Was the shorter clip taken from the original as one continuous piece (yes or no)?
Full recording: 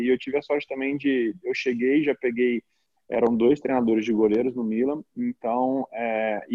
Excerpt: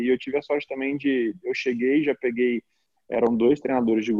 yes